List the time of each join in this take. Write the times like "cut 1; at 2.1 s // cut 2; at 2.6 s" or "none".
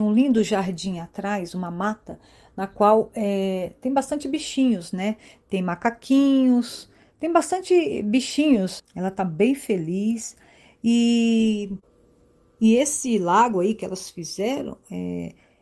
cut 1; at 8.8 s